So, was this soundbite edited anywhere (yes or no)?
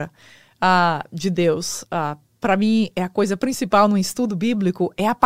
no